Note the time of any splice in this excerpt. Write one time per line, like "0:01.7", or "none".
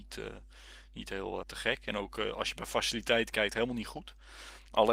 0:01.4